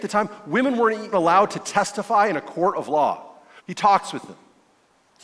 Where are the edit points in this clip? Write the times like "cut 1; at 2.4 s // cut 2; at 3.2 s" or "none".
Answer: cut 1; at 1.1 s // cut 2; at 3.6 s